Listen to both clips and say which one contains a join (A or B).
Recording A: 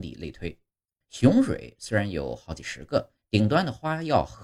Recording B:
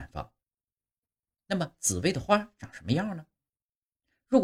A